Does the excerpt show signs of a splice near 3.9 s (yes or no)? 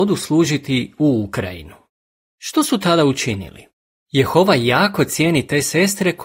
yes